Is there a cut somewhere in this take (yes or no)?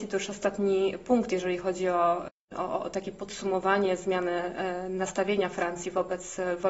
no